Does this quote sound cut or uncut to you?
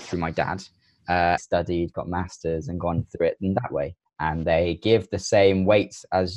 cut